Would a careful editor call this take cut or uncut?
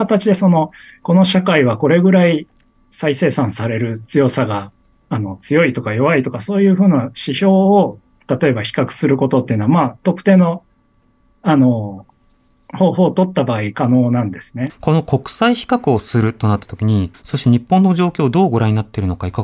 cut